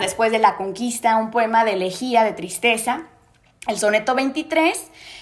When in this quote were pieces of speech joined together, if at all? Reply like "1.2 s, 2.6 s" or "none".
none